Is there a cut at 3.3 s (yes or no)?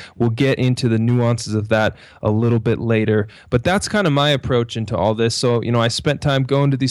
no